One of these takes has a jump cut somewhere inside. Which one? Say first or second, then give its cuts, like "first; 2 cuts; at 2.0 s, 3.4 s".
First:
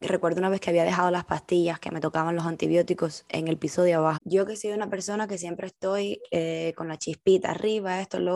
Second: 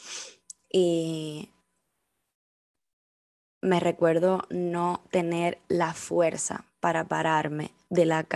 first; 1 cut; at 4.1 s